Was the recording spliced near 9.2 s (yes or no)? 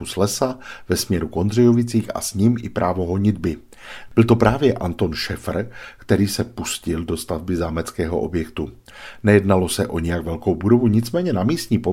no